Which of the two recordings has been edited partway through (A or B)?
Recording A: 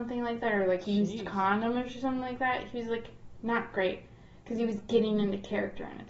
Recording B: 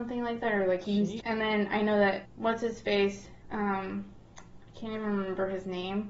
B